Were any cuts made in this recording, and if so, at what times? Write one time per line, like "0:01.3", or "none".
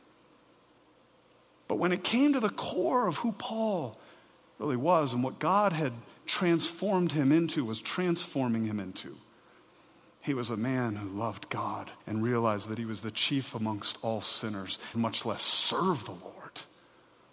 0:12.0
0:14.9